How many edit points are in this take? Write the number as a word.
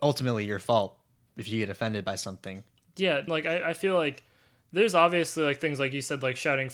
one